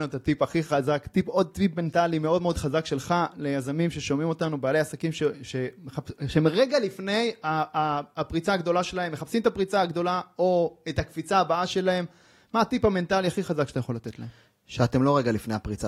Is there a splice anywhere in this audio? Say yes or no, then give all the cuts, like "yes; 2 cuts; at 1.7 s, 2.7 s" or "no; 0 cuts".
no; 0 cuts